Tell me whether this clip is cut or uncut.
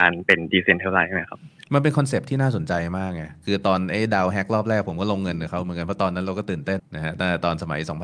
cut